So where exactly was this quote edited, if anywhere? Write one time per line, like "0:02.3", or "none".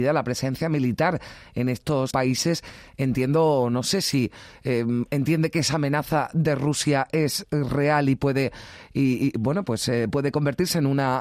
0:02.1